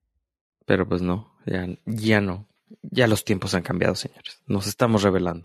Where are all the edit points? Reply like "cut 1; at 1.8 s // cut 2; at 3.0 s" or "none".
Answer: none